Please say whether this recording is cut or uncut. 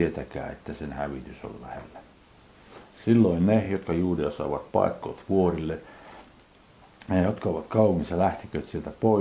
uncut